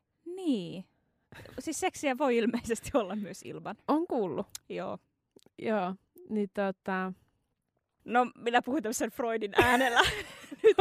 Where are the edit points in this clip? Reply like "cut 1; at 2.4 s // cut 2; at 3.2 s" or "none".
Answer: cut 1; at 8.0 s